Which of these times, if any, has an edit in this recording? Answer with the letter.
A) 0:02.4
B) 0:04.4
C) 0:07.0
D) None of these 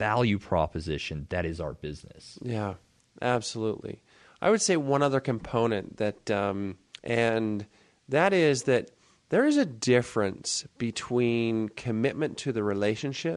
C